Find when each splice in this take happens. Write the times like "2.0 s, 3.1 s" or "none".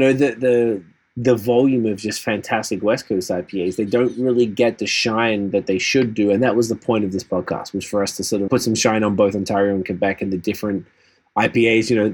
8.5 s